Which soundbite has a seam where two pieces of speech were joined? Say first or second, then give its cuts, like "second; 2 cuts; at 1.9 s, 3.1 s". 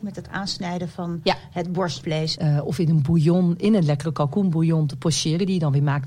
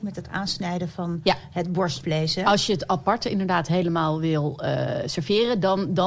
first; 1 cut; at 2.3 s